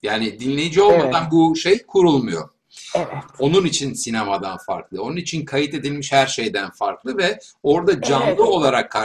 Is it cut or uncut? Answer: uncut